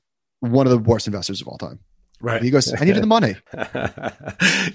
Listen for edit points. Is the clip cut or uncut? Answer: cut